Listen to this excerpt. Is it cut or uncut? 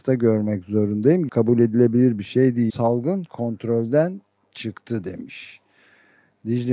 cut